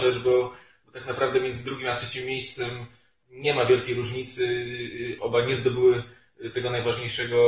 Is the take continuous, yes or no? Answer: no